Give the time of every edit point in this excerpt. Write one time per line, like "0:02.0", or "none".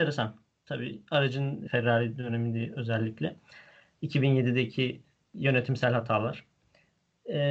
0:01.7